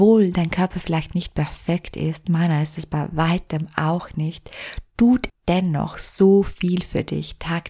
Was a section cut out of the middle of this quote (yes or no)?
yes